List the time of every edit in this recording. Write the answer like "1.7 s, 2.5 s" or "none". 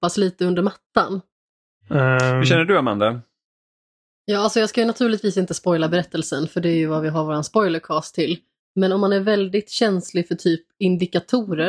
1.7 s